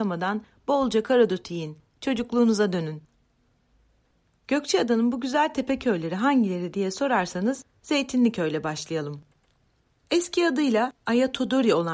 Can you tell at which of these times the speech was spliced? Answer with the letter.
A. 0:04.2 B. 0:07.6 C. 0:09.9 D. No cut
D